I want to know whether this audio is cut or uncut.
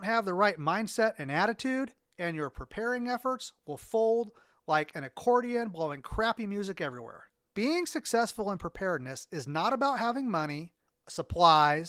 cut